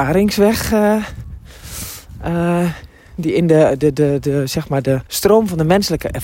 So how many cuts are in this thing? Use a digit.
1